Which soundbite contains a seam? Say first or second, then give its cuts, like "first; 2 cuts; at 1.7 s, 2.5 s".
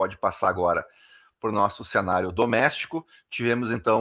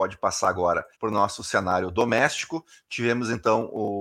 second; 1 cut; at 0.9 s